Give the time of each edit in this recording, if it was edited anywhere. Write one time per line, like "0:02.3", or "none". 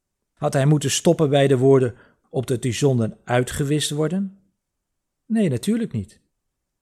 0:02.2